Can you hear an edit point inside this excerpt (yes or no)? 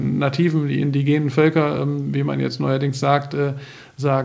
no